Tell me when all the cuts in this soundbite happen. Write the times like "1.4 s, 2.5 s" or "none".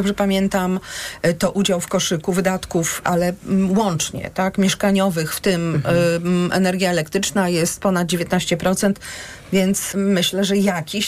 9.9 s

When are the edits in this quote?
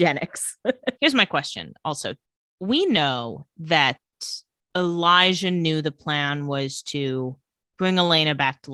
1.0 s

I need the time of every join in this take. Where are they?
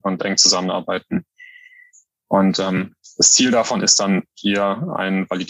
none

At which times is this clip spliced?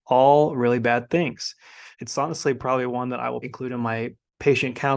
1.9 s, 3.4 s

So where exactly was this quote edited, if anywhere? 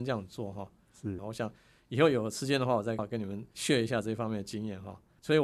1.2 s, 3.0 s

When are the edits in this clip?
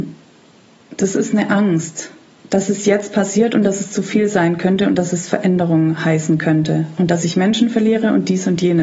none

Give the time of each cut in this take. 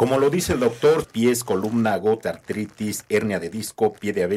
1.0 s, 2.2 s

